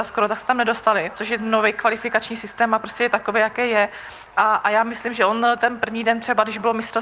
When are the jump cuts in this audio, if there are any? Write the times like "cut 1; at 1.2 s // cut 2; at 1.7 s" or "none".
cut 1; at 1.1 s // cut 2; at 4.3 s

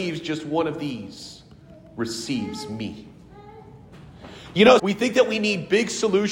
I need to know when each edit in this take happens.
cut 1; at 4.8 s

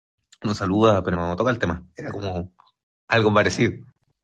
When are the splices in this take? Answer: cut 1; at 1.1 s

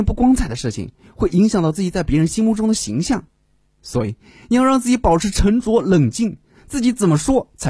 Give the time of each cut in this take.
cut 1; at 3.7 s // cut 2; at 6.6 s

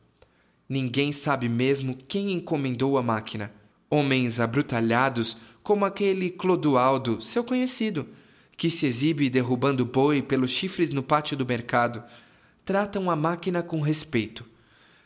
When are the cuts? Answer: cut 1; at 3.7 s

